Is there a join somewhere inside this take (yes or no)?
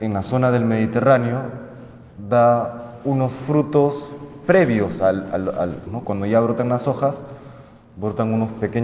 yes